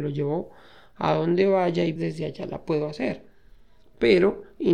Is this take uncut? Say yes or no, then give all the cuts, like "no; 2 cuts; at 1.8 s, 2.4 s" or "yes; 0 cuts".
no; 1 cut; at 2.0 s